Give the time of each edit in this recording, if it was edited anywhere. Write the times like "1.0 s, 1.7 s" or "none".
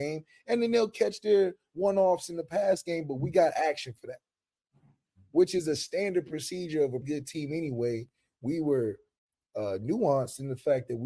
7.0 s